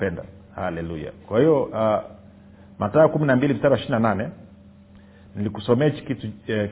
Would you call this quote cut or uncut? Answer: uncut